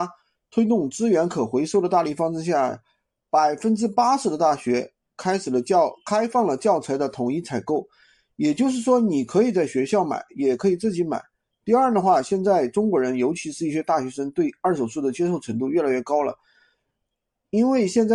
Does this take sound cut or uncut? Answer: uncut